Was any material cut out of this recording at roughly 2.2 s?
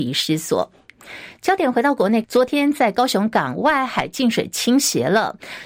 yes; 1 cut; at 2.2 s

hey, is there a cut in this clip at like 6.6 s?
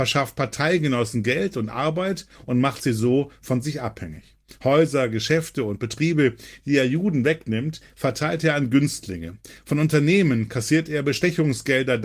no; 0 cuts

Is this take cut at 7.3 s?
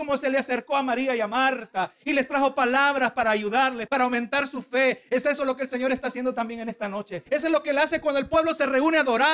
yes; 2 cuts; at 3.9 s, 7.3 s

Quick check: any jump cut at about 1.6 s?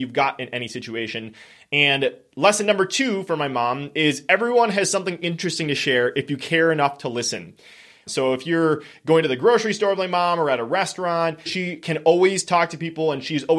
no; 2 cuts; at 8.1 s, 11.5 s

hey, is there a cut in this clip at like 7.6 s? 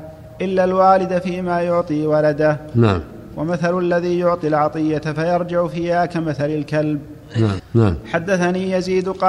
yes; 1 cut; at 7.6 s

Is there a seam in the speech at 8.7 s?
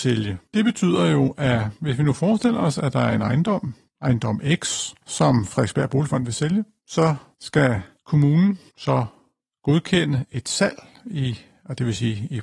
yes; 1 cut; at 8.7 s

